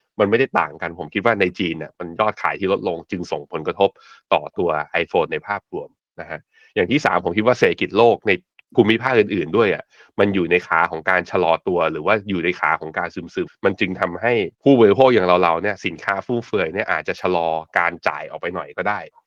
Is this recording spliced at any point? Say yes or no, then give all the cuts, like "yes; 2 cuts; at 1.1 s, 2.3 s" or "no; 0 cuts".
yes; 2 cuts; at 13.5 s, 14.5 s